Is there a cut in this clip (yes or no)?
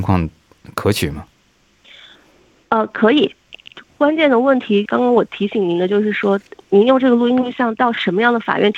no